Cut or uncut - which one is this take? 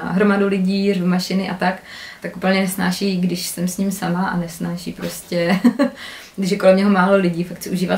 uncut